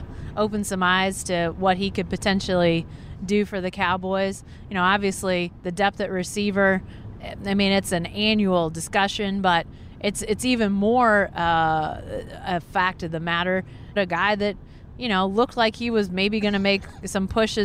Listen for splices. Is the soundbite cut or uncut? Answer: cut